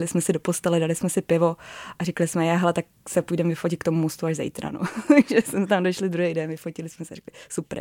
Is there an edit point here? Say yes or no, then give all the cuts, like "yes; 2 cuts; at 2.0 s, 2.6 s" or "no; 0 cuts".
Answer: no; 0 cuts